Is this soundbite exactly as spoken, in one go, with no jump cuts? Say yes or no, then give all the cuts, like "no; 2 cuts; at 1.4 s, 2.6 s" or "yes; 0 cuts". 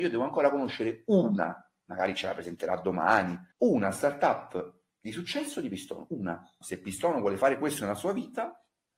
no; 2 cuts; at 3.5 s, 6.6 s